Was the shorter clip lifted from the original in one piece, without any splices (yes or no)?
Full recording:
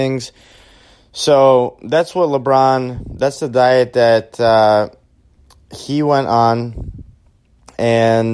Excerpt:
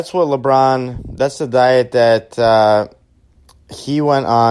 yes